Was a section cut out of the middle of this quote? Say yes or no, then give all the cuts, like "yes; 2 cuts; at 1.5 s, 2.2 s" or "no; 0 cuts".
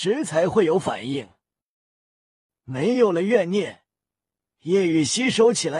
no; 0 cuts